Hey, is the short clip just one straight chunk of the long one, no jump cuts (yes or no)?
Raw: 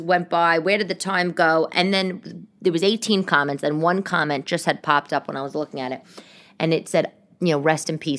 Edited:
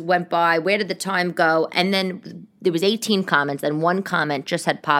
yes